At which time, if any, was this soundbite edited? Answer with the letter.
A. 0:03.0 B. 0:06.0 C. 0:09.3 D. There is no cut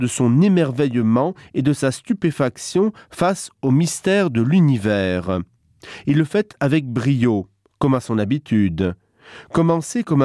D